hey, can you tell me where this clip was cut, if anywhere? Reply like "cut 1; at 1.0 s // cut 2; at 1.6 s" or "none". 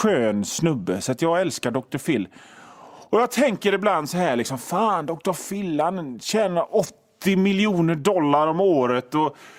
none